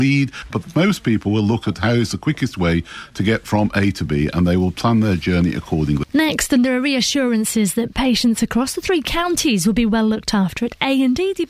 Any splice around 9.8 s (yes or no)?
no